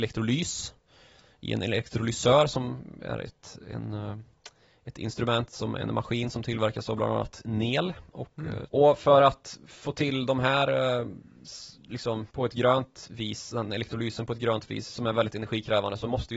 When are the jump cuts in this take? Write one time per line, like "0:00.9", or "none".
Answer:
0:08.7
0:12.3

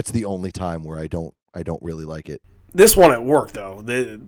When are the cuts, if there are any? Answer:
none

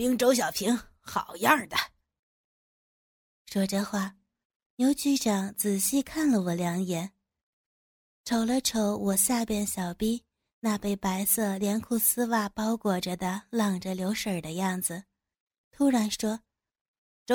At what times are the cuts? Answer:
none

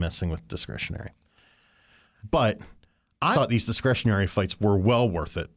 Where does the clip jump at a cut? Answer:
0:02.2
0:03.3

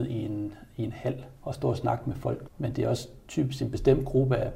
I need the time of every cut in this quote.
0:01.4
0:02.5

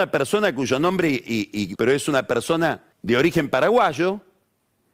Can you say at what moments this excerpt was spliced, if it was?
0:01.8
0:02.9

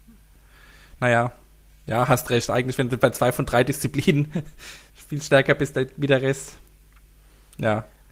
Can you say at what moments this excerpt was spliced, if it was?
0:01.0

